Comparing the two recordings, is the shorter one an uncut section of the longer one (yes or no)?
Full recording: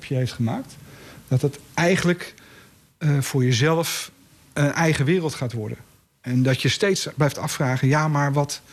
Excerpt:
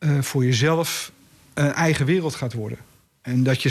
yes